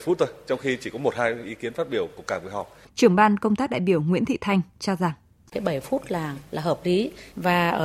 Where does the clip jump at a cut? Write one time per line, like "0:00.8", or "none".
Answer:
0:02.9